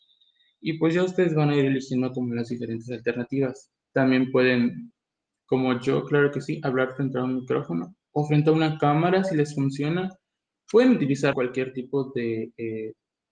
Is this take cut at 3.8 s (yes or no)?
no